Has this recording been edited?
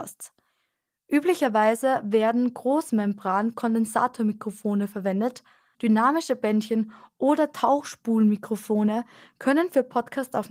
yes; 1 cut; at 5.7 s

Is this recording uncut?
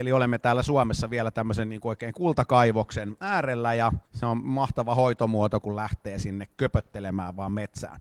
no; 2 cuts; at 4.1 s, 5.6 s

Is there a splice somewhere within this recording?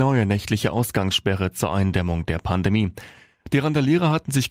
no; 0 cuts

